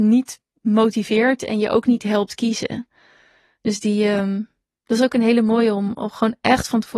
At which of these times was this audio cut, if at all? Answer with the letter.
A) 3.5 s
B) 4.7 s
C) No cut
C